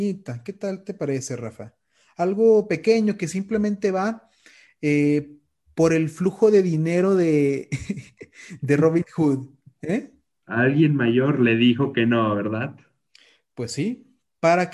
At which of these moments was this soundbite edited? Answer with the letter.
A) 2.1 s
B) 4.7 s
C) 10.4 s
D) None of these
C